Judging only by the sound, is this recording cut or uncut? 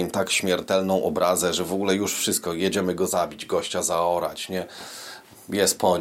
uncut